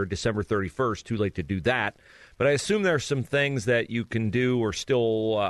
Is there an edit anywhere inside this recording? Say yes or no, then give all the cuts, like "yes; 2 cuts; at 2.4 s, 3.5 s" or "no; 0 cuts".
no; 0 cuts